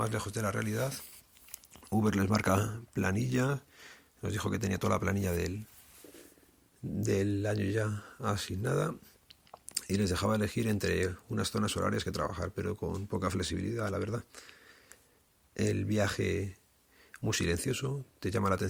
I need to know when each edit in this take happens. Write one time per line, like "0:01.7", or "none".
none